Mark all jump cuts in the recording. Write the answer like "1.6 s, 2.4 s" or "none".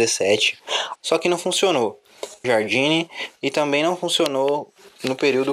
1.0 s, 2.4 s